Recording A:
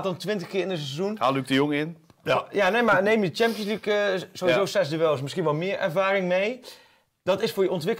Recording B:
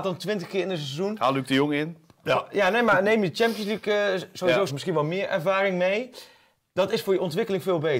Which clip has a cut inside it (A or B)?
B